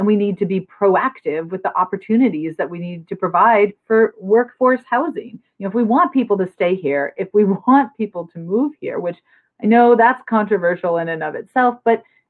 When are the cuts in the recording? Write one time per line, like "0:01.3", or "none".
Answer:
none